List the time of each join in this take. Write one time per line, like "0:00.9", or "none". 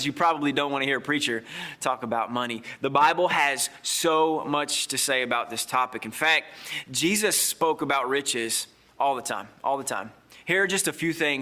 none